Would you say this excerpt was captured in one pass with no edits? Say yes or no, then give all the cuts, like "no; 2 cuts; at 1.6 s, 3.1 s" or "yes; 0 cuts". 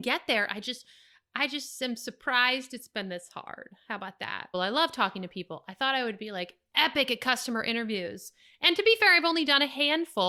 no; 1 cut; at 4.5 s